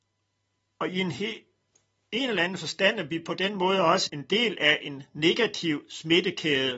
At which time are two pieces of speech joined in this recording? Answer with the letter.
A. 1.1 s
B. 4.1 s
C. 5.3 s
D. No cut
B